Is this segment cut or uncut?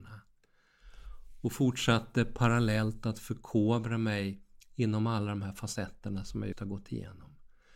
cut